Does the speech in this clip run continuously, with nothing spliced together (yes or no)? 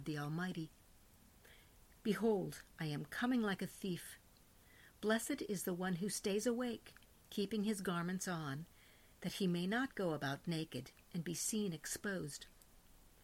yes